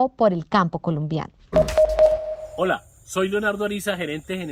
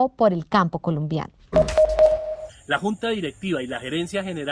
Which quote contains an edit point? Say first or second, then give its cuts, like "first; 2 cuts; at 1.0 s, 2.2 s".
second; 1 cut; at 2.5 s